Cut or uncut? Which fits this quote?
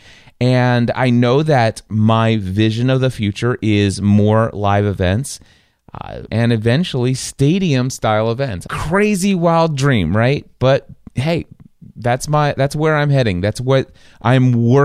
cut